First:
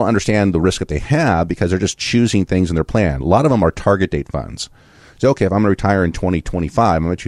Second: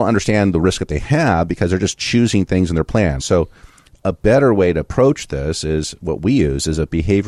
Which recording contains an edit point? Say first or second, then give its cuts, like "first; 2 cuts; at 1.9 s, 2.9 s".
second; 1 cut; at 3.2 s